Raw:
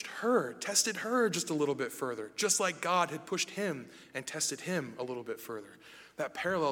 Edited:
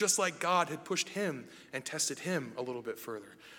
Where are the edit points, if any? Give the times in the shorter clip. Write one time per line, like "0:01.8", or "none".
none